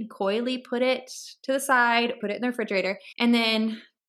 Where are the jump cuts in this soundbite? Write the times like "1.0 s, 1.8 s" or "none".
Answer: 2.2 s

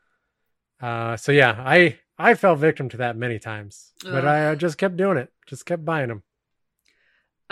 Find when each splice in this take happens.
none

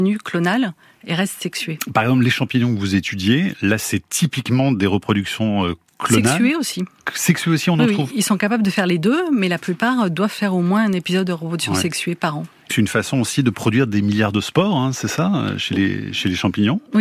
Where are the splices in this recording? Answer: 12.7 s

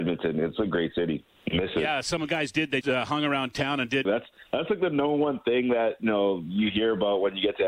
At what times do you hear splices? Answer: 2.8 s, 4.1 s

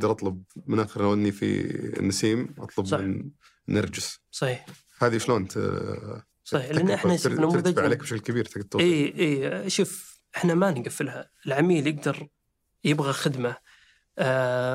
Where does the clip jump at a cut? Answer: none

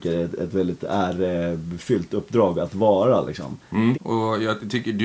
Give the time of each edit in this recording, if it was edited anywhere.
3.9 s

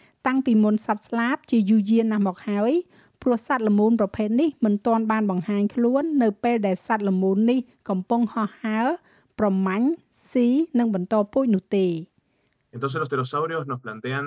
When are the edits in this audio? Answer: none

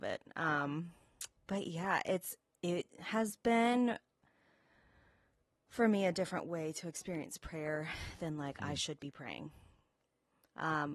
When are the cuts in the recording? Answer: 1.4 s

